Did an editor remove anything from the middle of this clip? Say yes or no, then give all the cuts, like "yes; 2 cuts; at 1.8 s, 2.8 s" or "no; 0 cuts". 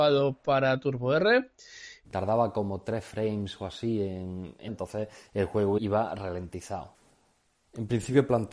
yes; 2 cuts; at 2.0 s, 4.7 s